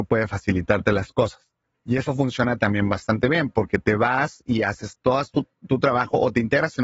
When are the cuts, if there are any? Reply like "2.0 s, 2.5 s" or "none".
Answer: 1.7 s